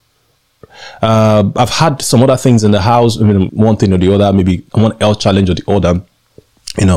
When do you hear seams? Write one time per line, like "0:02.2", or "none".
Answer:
0:03.5
0:04.7